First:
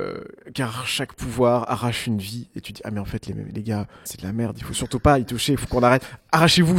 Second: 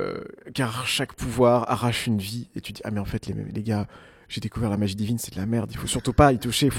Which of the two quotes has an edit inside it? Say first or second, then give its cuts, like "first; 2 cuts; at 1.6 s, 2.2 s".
first; 1 cut; at 4.1 s